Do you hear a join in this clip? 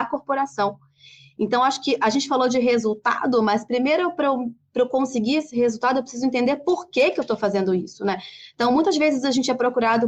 no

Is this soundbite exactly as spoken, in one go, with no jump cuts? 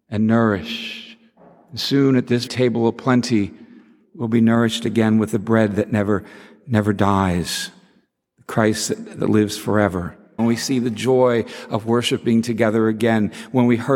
no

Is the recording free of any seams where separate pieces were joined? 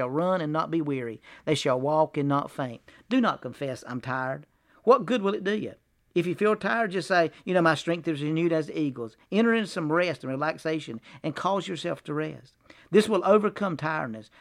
yes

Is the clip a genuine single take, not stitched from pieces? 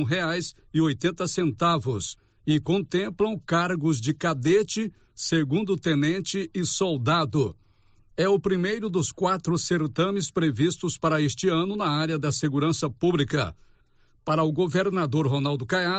yes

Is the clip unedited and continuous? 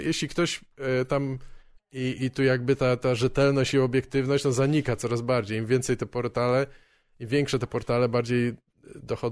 no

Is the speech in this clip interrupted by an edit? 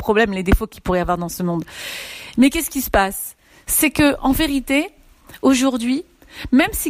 no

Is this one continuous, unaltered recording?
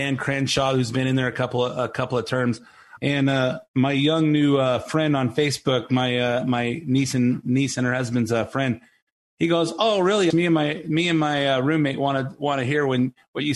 no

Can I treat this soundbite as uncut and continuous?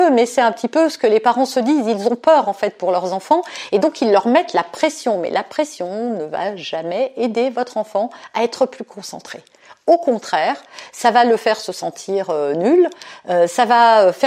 yes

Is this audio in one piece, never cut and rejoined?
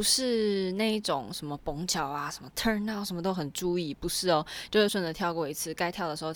no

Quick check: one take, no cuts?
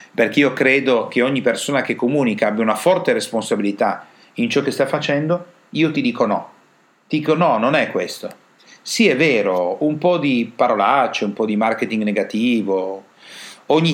yes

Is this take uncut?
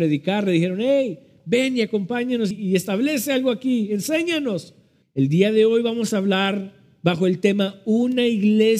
no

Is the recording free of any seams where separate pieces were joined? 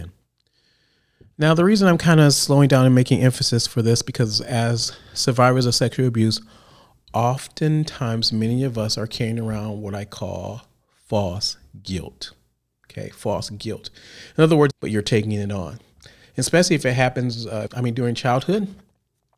no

